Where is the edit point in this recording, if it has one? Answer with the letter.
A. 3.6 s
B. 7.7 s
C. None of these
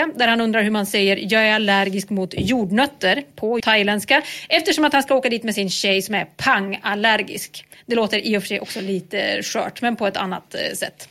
A